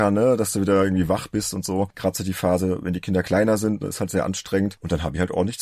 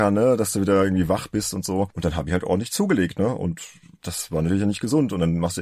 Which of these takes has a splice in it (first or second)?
second